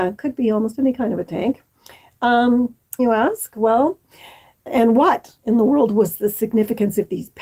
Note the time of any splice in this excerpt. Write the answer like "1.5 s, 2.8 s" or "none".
3.0 s